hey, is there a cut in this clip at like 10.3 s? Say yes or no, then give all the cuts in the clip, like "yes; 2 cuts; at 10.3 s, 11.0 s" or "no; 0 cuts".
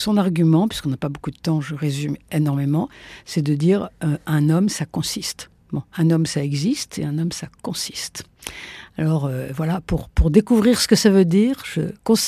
no; 1 cut; at 5.6 s